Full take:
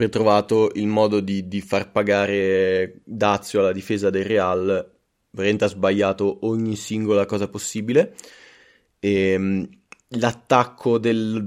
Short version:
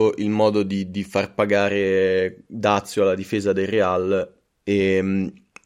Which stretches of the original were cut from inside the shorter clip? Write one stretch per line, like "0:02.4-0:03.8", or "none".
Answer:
0:05.1-0:08.9

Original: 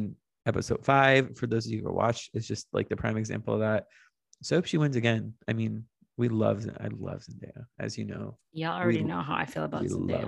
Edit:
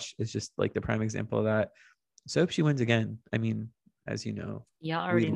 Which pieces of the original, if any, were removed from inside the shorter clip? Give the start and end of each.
0:06.1-0:07.7

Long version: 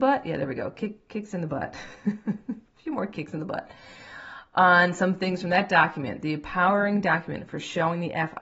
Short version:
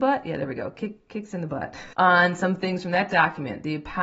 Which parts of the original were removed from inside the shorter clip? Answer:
0:01.9-0:04.5

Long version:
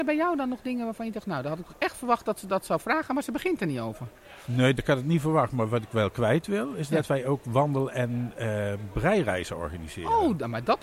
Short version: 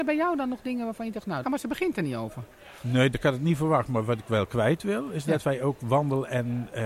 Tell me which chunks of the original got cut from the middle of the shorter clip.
0:01.4-0:03.1

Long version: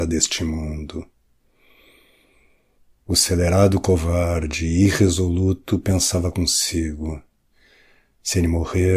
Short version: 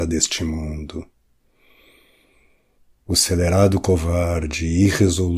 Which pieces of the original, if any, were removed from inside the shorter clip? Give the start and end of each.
none

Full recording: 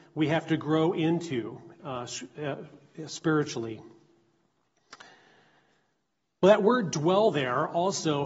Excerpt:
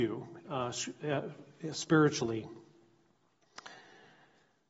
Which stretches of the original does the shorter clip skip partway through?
none

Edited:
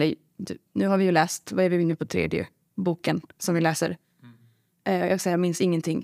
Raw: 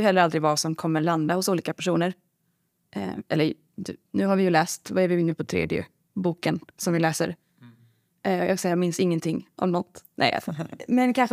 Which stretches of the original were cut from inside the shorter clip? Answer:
none

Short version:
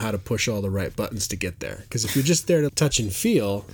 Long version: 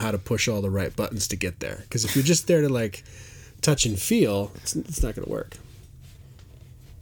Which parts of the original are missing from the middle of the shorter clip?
0:02.7-0:03.5

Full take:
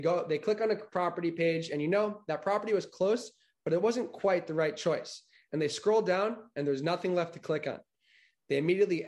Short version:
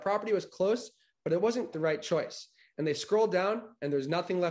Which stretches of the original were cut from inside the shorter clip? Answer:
0:04.1-0:04.5

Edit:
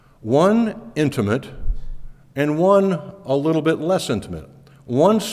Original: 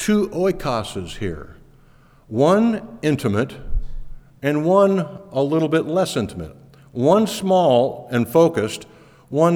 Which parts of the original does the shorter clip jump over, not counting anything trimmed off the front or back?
none

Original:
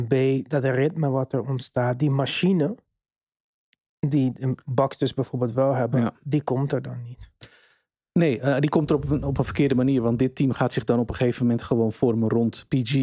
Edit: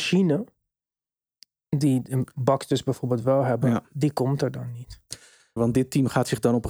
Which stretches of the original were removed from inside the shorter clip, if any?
0:07.9-0:10.0

